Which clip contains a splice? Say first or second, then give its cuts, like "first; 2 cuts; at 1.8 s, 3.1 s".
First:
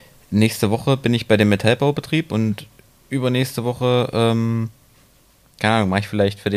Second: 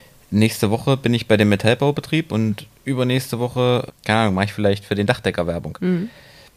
second; 2 cuts; at 2.7 s, 3.9 s